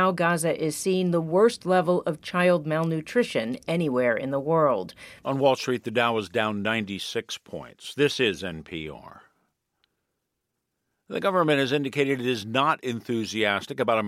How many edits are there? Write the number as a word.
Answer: one